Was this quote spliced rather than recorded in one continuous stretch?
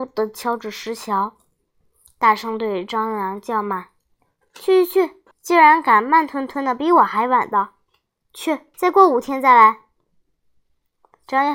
yes; 2 cuts; at 5.3 s, 8.7 s

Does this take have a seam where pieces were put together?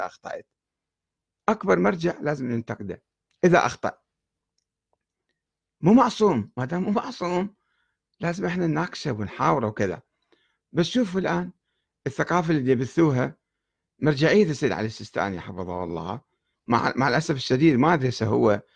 no; 0 cuts

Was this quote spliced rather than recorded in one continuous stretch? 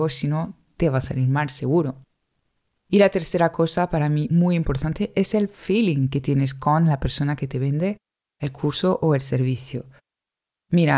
no; 0 cuts

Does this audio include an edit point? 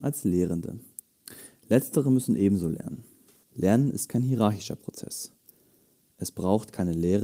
yes; 1 cut; at 3.4 s

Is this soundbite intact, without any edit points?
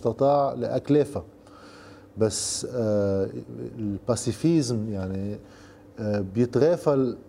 yes; 0 cuts

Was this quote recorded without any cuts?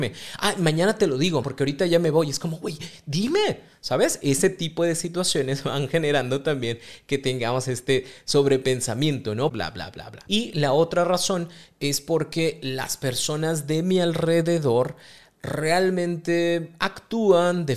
no; 2 cuts; at 1.4 s, 9.5 s

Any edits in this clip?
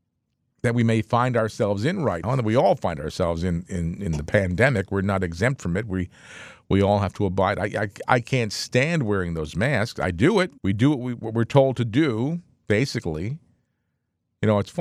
yes; 2 cuts; at 2.2 s, 10.6 s

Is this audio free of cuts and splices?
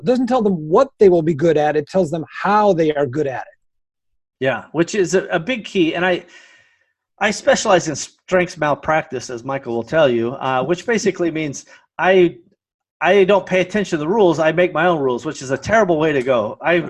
yes; 0 cuts

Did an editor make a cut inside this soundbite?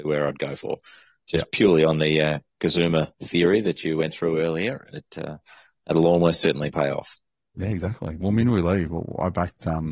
no; 0 cuts

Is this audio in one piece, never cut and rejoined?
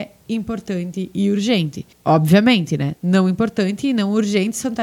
yes; 0 cuts

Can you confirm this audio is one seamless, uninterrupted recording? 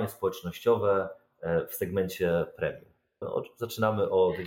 no; 1 cut; at 3.2 s

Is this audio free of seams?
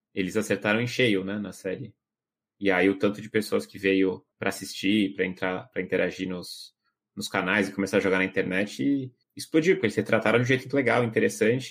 no; 2 cuts; at 4.3 s, 9.2 s

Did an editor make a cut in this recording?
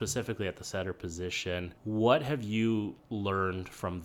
yes; 1 cut; at 1.8 s

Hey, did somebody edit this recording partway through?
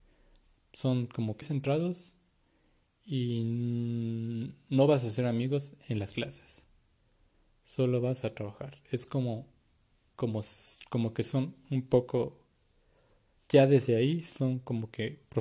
yes; 1 cut; at 1.4 s

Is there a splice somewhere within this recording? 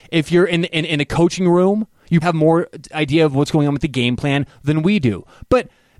yes; 1 cut; at 2.2 s

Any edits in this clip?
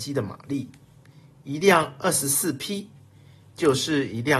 no; 0 cuts

